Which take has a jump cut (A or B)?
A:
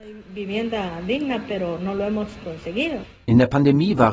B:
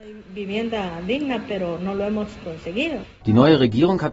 B